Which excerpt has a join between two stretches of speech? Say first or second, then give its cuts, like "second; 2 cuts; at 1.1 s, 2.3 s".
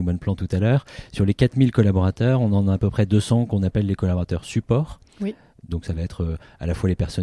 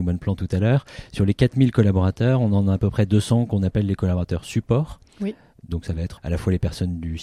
second; 1 cut; at 6.2 s